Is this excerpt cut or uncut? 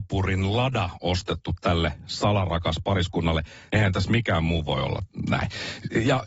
cut